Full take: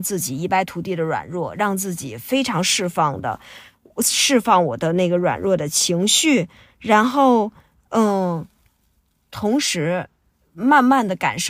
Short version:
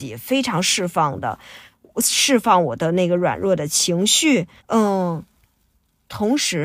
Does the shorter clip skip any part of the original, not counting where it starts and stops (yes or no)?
yes